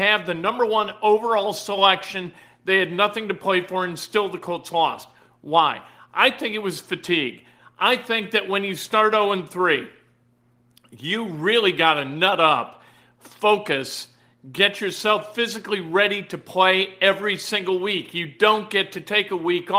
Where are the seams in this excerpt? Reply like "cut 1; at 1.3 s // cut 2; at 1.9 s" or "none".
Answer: none